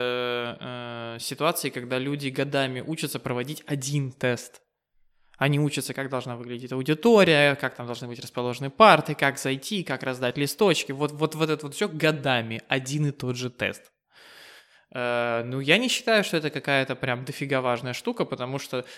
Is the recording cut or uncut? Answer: uncut